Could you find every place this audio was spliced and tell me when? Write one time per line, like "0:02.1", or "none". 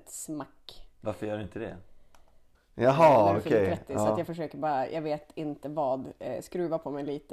0:02.6